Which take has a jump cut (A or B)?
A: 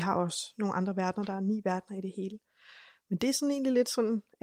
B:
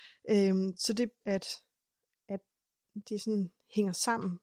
B